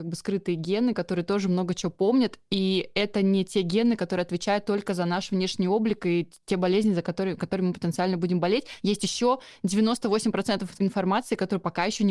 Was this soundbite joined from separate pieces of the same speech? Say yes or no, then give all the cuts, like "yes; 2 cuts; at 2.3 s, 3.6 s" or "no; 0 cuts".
no; 0 cuts